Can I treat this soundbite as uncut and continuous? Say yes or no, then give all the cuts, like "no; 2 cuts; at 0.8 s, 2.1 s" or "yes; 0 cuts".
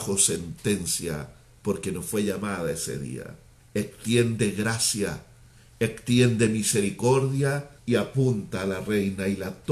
no; 2 cuts; at 3.6 s, 7.8 s